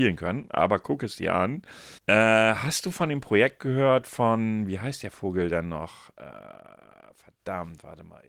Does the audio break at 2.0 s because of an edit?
yes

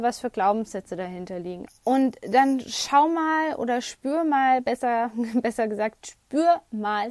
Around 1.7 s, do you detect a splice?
yes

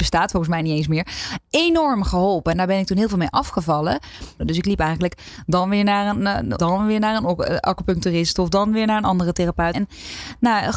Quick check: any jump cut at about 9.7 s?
yes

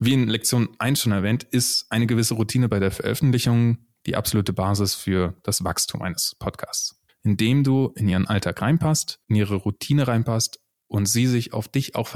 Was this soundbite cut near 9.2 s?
yes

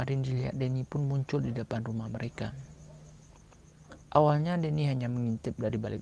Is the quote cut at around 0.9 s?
no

